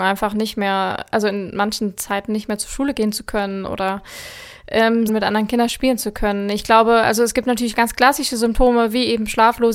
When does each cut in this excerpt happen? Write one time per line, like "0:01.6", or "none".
0:05.1